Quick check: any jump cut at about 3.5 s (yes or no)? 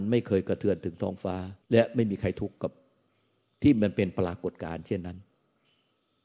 no